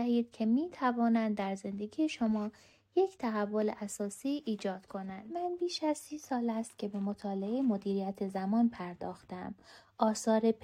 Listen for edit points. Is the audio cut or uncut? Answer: uncut